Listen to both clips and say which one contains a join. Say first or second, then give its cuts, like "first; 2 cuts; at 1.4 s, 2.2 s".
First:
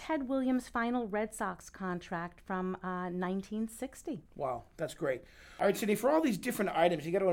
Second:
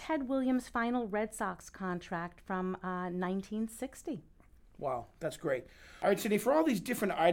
first; 1 cut; at 4.3 s